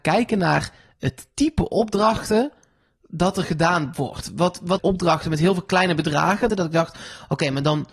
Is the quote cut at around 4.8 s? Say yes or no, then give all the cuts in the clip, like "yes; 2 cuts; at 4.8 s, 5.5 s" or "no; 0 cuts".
yes; 2 cuts; at 4.8 s, 6.5 s